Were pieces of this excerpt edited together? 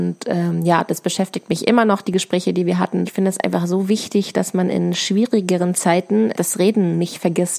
yes; 2 cuts; at 3.1 s, 6.3 s

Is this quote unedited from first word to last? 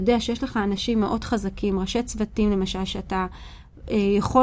yes; 0 cuts

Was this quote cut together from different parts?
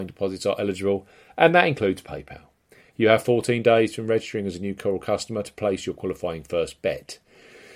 no; 0 cuts

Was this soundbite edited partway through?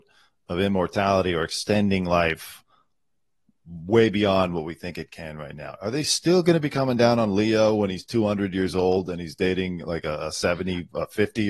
no; 0 cuts

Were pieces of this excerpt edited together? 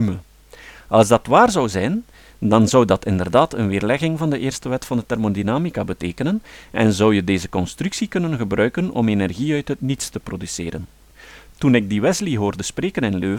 no; 0 cuts

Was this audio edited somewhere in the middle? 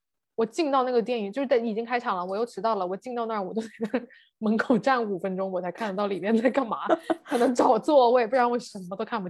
no; 0 cuts

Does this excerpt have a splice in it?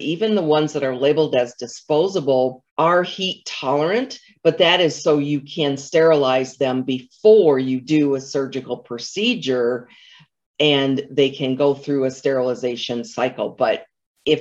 yes; 1 cut; at 2.7 s

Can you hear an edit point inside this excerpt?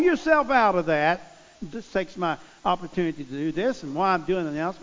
yes; 1 cut; at 1.7 s

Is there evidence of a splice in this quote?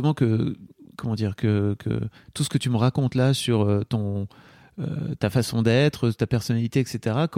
no; 0 cuts

